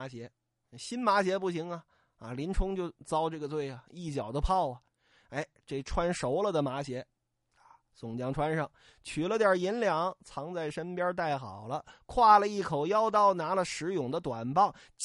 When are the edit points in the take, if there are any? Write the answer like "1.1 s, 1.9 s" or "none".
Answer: none